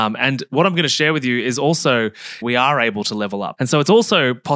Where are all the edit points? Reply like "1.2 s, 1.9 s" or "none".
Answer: 2.4 s, 3.6 s